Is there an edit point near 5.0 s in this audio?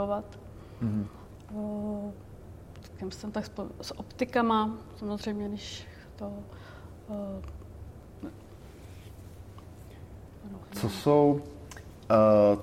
no; 0 cuts

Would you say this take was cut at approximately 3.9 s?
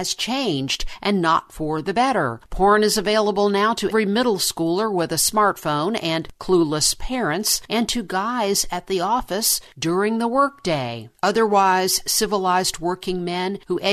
yes; 1 cut; at 3.9 s

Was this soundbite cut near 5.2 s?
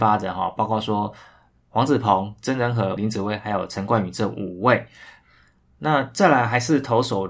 no; 1 cut; at 3.0 s

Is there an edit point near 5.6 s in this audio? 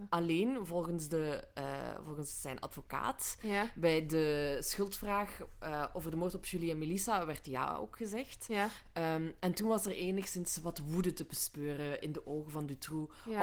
no; 0 cuts

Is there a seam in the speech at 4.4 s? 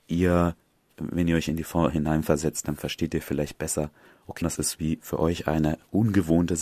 yes; 1 cut; at 4.4 s

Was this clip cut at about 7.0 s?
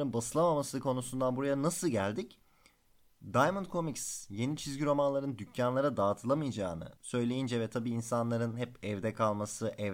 yes; 1 cut; at 7.0 s

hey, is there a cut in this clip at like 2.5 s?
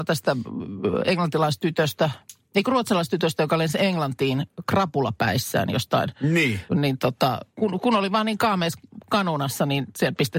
no; 1 cut; at 6.7 s

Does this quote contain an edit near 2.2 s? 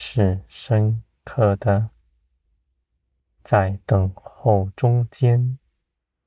no; 1 cut; at 3.4 s

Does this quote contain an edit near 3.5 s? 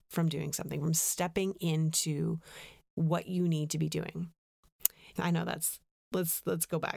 no; 1 cut; at 5.2 s

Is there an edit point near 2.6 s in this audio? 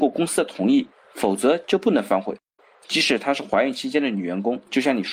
yes; 1 cut; at 2.6 s

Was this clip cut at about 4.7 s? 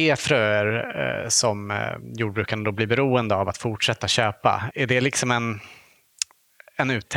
yes; 1 cut; at 4.7 s

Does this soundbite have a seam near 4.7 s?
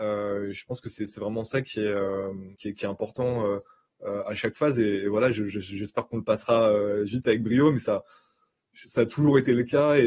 no; 1 cut; at 2.5 s

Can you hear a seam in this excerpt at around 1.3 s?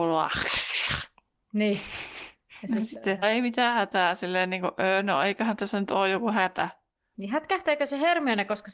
no; 2 cuts; at 3.2 s, 7.1 s

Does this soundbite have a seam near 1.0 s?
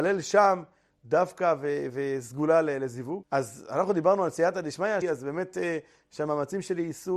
no; 2 cuts; at 3.2 s, 5.0 s

